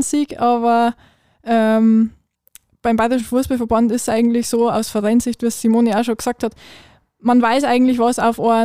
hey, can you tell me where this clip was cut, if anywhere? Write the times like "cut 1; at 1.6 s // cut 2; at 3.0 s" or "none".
none